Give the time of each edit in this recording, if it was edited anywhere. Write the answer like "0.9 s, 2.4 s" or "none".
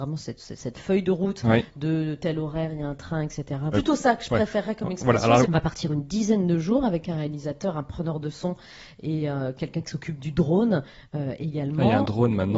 3.7 s, 5.4 s